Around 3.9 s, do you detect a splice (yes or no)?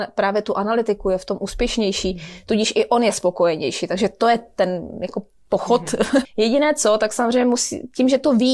no